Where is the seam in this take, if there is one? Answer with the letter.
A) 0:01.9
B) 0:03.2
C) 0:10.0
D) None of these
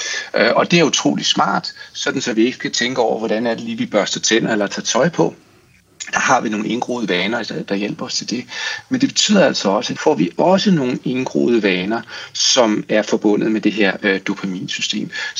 C